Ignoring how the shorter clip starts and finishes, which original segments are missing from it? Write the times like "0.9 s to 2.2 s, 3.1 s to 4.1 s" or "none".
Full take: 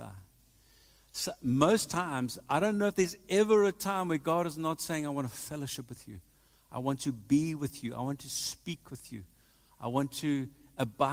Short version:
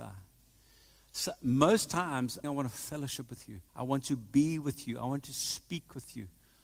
2.4 s to 5.0 s, 6.3 s to 6.6 s